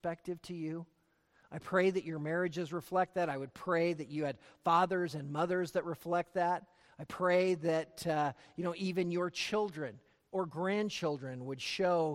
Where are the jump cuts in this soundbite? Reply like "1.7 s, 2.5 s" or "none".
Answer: none